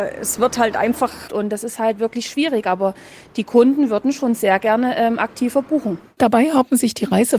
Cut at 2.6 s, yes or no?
no